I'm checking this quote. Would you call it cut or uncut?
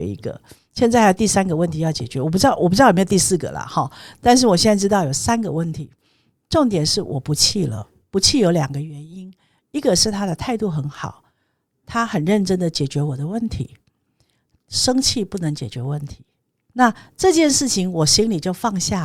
cut